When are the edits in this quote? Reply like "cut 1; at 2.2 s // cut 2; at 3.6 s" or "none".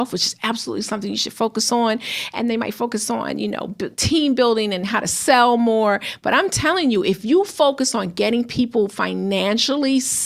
none